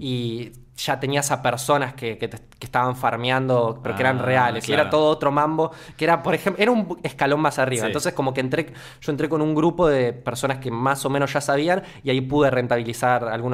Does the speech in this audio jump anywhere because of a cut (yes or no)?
no